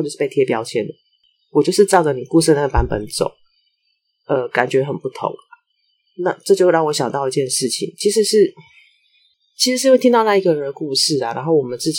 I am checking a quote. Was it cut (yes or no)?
no